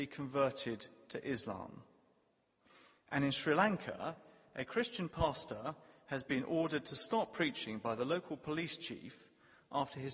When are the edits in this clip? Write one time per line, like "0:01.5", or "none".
none